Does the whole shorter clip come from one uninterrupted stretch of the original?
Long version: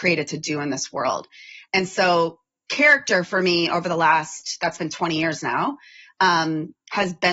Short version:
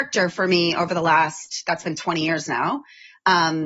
yes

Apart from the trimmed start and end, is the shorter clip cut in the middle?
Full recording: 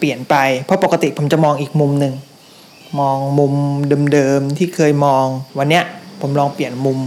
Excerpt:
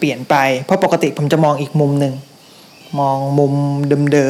no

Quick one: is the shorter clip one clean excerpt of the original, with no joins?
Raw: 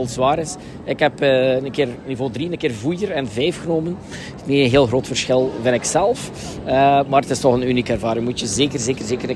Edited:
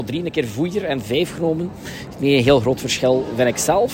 yes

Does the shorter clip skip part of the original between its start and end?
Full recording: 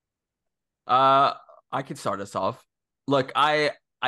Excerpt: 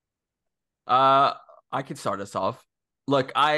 no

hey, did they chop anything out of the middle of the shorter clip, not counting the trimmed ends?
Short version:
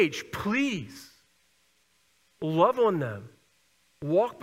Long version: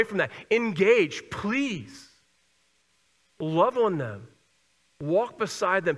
no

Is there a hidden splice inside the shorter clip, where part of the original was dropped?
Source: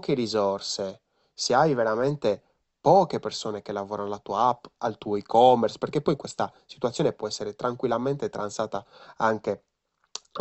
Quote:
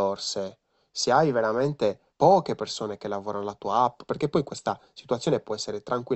yes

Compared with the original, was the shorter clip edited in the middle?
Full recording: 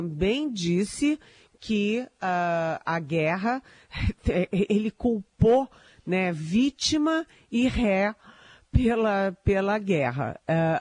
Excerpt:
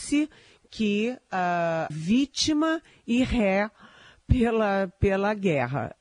yes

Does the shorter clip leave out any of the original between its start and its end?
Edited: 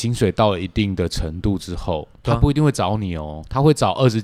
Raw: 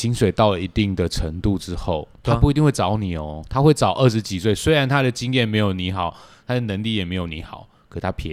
no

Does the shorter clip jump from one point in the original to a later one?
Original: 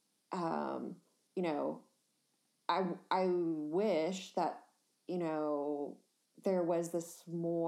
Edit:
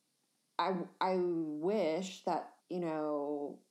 yes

